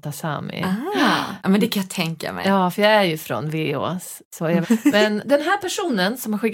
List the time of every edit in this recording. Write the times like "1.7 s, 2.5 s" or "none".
4.6 s